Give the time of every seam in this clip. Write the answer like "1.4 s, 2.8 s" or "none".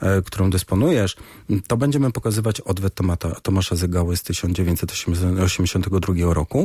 none